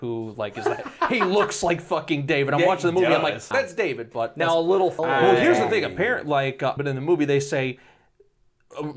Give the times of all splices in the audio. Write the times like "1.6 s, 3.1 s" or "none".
3.5 s, 5.0 s, 6.8 s